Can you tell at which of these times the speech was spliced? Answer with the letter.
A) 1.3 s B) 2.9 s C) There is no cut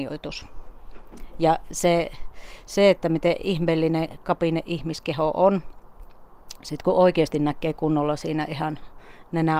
C